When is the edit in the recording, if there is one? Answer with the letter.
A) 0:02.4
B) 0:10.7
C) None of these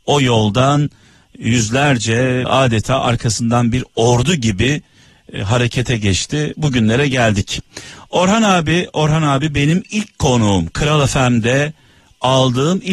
A